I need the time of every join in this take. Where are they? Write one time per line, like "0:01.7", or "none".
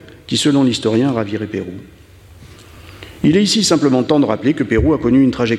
none